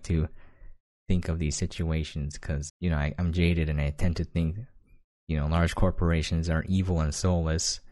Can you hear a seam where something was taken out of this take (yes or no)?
yes